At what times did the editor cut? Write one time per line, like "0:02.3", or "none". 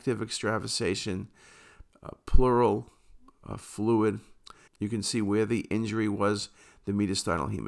0:01.9
0:04.7